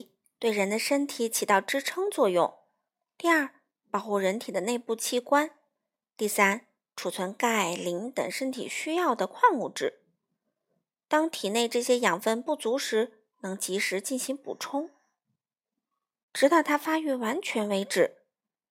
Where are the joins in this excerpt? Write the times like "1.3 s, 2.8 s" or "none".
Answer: 16.1 s